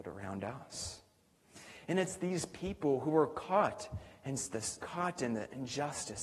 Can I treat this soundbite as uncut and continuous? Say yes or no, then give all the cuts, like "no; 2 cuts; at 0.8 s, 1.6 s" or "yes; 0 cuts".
no; 1 cut; at 4.8 s